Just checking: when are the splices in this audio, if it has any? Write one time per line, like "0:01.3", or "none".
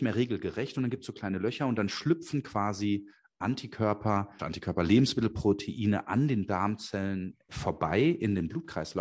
0:04.4
0:07.5